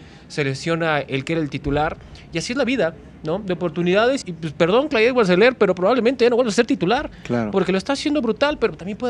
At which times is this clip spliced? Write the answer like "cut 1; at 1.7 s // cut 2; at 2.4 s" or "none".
cut 1; at 4.2 s